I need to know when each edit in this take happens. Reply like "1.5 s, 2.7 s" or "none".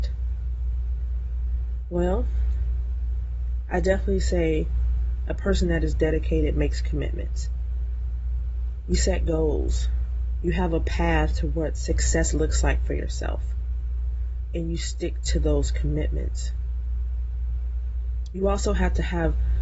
10.4 s